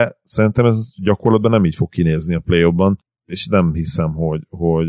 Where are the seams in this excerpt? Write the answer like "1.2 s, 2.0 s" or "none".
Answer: none